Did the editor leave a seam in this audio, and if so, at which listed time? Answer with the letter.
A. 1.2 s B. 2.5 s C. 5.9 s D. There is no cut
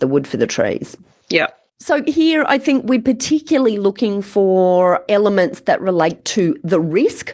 A